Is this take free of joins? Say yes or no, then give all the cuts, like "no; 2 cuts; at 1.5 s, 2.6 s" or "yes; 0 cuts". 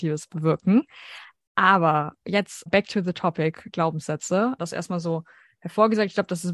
no; 2 cuts; at 2.7 s, 4.6 s